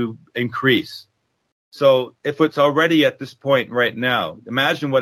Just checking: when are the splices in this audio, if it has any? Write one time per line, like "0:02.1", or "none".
none